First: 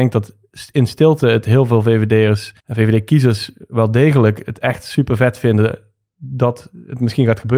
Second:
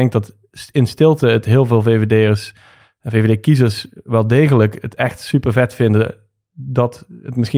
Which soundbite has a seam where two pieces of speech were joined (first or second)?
first